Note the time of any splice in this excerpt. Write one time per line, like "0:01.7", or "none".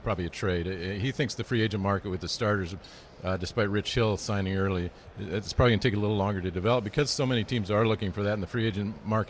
none